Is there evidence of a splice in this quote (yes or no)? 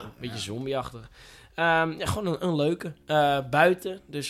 no